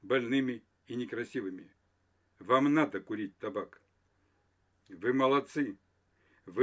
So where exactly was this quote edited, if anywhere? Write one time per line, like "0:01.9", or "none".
none